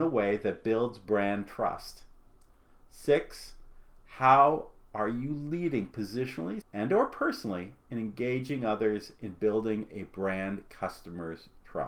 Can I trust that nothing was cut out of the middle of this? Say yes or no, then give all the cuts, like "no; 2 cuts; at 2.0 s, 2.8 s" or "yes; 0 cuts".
no; 1 cut; at 6.6 s